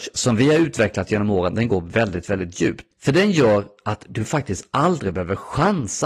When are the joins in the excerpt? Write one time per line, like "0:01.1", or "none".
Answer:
0:02.9